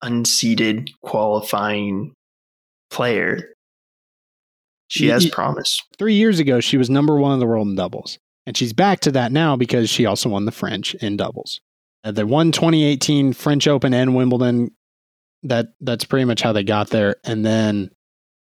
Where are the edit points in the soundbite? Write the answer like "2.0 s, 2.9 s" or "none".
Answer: 5.9 s

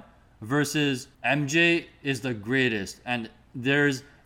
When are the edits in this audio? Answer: 1.1 s

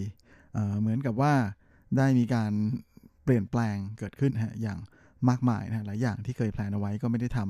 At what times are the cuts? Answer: 4.3 s

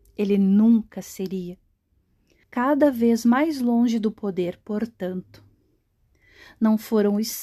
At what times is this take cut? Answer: 2.4 s

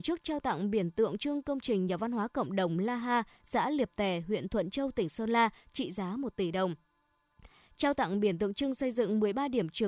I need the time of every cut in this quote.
none

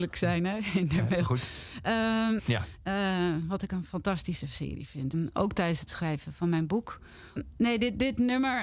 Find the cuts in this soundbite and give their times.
2.4 s, 5.1 s, 7.4 s

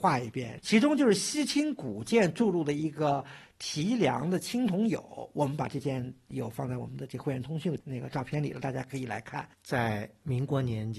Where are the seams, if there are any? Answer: 9.5 s

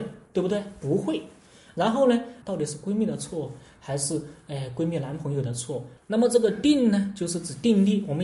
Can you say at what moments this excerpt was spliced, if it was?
2.4 s, 6.0 s

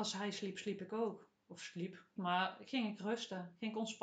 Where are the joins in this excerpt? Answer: 2.2 s

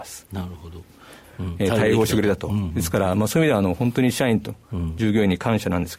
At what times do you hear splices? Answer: 1.2 s

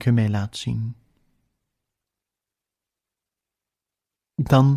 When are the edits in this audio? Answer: none

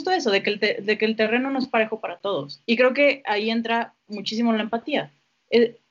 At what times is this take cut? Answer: 2.6 s, 4.1 s

